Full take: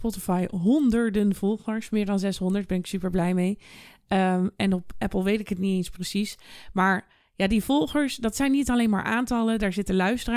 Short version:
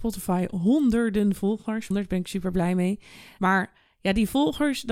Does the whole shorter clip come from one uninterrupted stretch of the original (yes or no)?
no